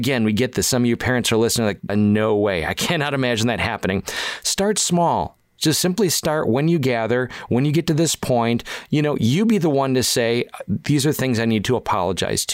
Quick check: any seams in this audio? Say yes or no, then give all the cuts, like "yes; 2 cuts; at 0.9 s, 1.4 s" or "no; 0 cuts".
yes; 1 cut; at 1.9 s